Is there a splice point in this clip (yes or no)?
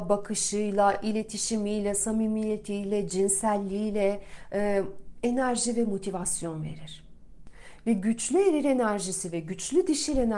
no